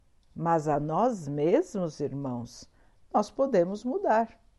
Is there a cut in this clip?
no; 0 cuts

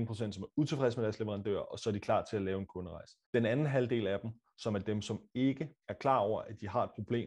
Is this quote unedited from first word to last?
no; 2 cuts; at 3.2 s, 5.8 s

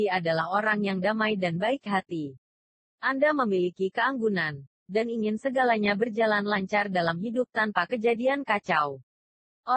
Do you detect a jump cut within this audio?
yes; 1 cut; at 4.8 s

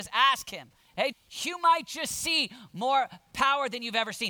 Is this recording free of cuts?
no; 1 cut; at 1.1 s

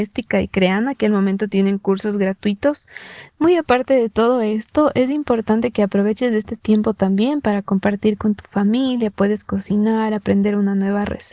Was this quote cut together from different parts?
yes; 1 cut; at 3.3 s

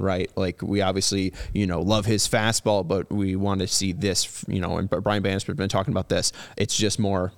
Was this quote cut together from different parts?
no; 0 cuts

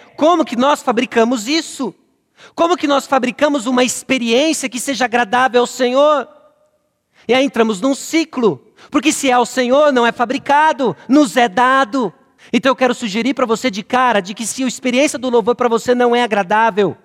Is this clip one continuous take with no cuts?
no; 1 cut; at 12.4 s

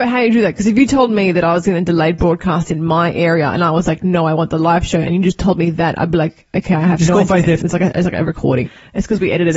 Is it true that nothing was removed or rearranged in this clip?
no; 2 cuts; at 7.6 s, 8.6 s

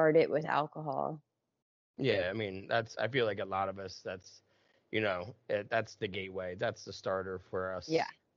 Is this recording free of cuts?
yes; 0 cuts

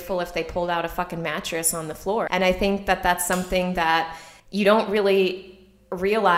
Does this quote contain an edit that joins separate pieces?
yes; 2 cuts; at 2.3 s, 4.4 s

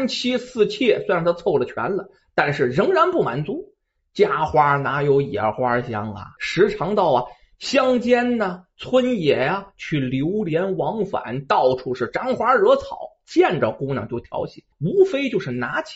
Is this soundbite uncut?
no; 2 cuts; at 6.4 s, 14.7 s

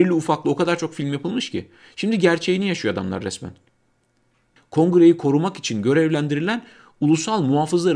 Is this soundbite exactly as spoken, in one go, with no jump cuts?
no; 1 cut; at 4.6 s

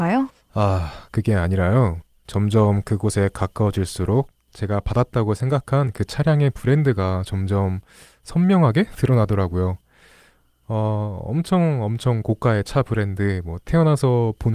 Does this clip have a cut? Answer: no; 0 cuts

